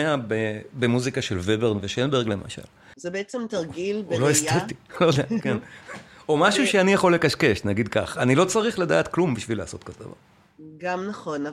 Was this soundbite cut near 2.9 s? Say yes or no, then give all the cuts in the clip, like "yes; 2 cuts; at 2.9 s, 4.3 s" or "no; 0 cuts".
yes; 1 cut; at 2.9 s